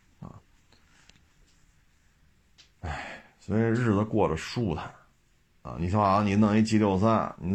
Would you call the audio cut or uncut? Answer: uncut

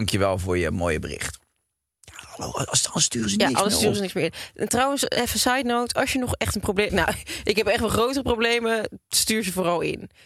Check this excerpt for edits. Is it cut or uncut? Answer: cut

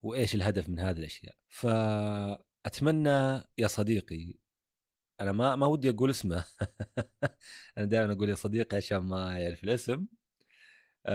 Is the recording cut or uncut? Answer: cut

